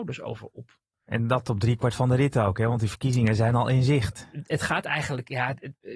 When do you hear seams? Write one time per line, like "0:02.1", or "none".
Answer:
none